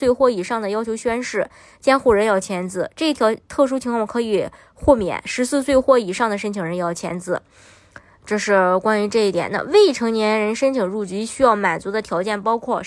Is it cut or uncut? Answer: uncut